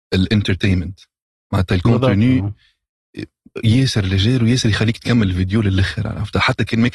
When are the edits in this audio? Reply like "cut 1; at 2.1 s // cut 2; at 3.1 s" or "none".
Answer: none